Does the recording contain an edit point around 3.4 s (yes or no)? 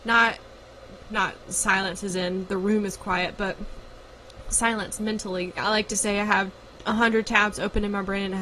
no